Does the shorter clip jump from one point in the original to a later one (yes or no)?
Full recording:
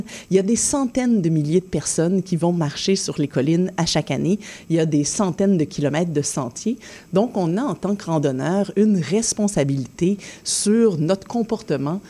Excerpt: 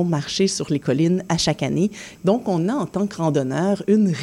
yes